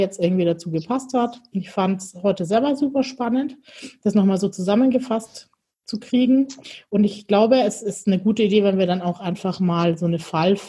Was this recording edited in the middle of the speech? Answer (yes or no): no